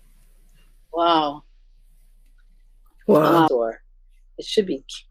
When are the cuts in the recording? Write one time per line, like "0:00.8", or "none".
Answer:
0:03.5